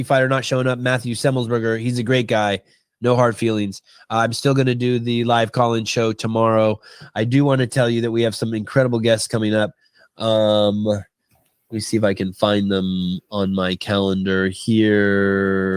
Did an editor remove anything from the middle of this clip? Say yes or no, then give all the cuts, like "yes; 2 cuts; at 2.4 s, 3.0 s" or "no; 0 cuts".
no; 0 cuts